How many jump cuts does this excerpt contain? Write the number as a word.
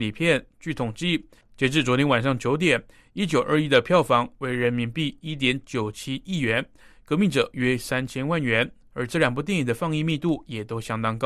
zero